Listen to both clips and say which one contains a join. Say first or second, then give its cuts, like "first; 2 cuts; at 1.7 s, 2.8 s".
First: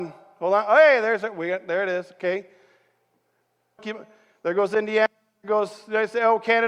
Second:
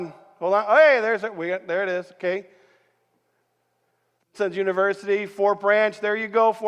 first; 1 cut; at 3.8 s